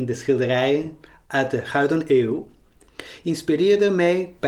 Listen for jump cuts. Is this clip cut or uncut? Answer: uncut